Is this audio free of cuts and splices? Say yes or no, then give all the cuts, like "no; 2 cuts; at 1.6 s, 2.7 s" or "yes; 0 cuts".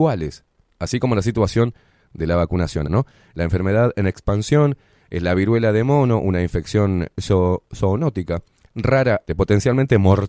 no; 2 cuts; at 2.8 s, 9.3 s